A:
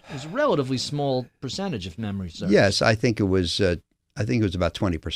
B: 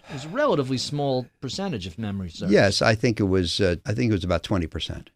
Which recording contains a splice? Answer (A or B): B